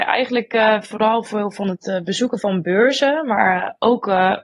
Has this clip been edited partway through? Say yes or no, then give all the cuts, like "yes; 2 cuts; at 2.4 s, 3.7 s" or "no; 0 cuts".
no; 0 cuts